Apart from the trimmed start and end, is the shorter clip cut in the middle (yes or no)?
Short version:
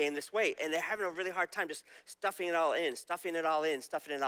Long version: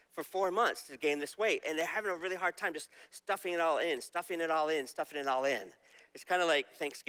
no